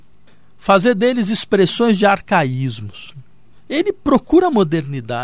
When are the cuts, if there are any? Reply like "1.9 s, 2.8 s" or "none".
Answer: 3.6 s